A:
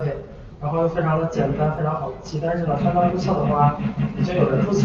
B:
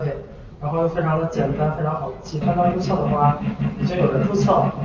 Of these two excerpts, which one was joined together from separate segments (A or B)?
B